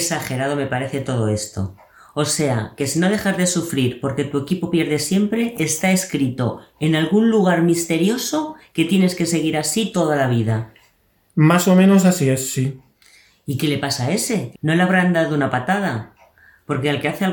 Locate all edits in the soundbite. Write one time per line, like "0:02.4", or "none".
0:14.5